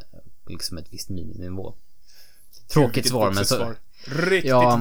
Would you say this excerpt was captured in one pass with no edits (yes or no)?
yes